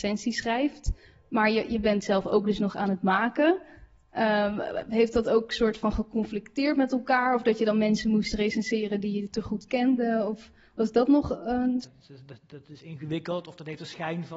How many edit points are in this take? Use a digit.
1